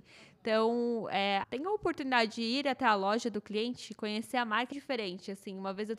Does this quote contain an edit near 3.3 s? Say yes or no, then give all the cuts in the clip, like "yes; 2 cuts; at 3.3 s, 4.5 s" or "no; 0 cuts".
no; 2 cuts; at 1.4 s, 4.7 s